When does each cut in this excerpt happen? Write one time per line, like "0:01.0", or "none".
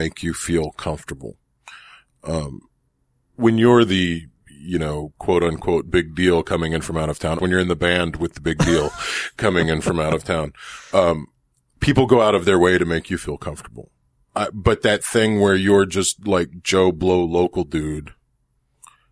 0:07.4